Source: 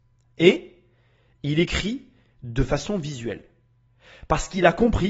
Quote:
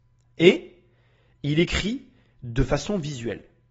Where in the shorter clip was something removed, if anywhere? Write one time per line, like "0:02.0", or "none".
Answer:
none